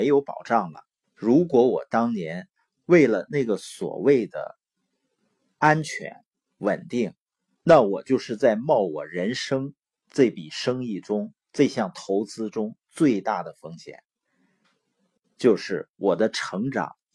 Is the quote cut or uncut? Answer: cut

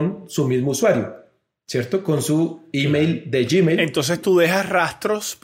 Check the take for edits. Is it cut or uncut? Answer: uncut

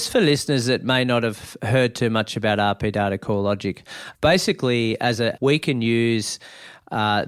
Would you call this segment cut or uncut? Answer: cut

